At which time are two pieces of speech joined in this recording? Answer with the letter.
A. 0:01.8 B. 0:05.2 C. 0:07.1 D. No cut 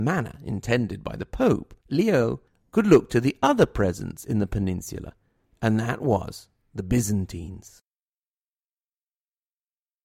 A